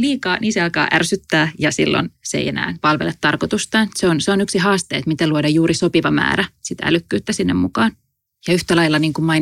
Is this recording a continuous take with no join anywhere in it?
yes; 0 cuts

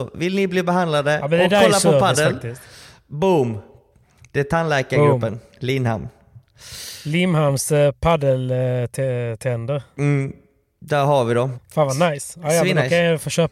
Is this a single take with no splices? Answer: no; 1 cut; at 11.5 s

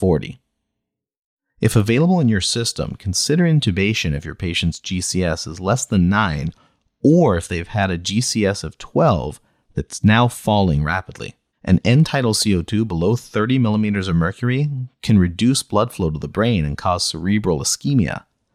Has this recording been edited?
yes; 1 cut; at 11.5 s

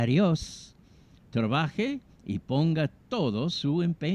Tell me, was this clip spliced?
yes; 1 cut; at 1.2 s

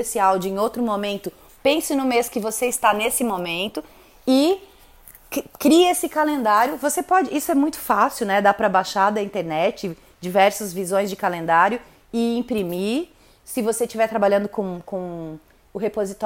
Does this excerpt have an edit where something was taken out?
no; 0 cuts

